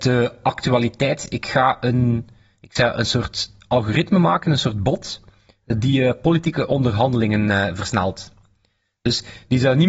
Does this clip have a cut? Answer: no; 0 cuts

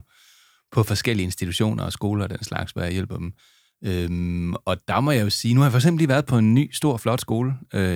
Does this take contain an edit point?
no; 0 cuts

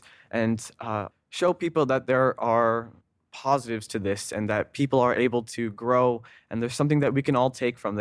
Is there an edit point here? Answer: yes; 1 cut; at 1.1 s

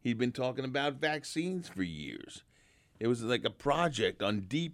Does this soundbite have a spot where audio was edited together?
no; 0 cuts

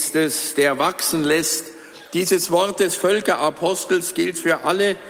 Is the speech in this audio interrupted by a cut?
no; 0 cuts

